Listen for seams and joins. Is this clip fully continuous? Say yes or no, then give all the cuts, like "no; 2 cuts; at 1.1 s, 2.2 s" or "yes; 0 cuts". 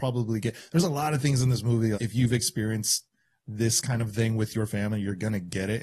no; 1 cut; at 1.9 s